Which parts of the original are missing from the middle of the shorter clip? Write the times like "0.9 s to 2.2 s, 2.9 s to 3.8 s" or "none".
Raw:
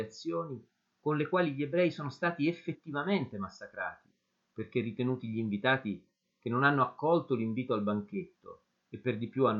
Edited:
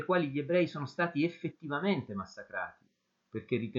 none